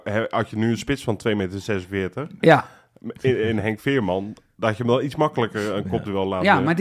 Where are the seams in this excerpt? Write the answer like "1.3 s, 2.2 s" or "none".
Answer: none

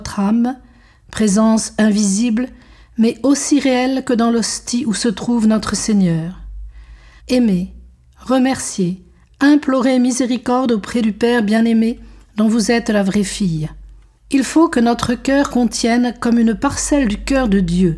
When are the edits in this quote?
7.2 s, 14.1 s

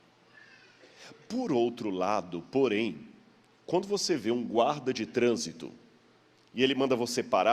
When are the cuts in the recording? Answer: none

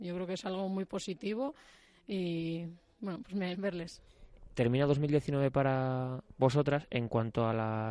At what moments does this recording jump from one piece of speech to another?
3.5 s

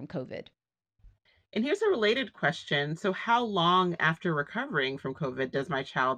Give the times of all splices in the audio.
none

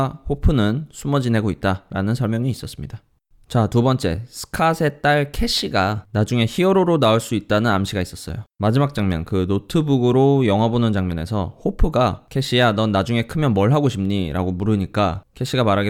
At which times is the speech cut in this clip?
none

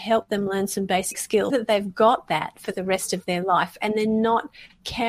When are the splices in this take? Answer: 1.5 s

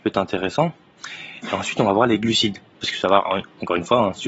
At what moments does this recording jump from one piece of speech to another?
2.7 s

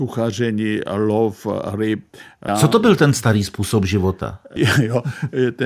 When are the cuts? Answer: 2.5 s, 4.6 s

